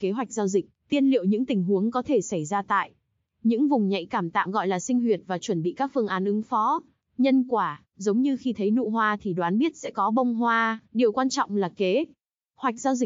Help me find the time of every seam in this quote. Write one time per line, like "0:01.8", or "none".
0:07.0
0:10.8